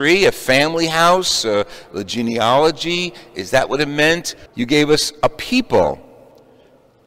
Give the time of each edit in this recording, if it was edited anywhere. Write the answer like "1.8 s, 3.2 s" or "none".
4.5 s